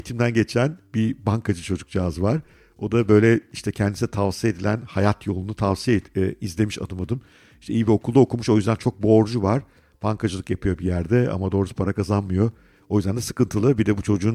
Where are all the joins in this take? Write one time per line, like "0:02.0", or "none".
none